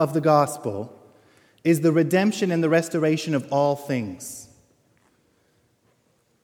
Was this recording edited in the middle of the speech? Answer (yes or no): no